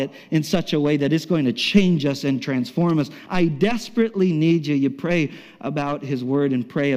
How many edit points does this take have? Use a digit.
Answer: 1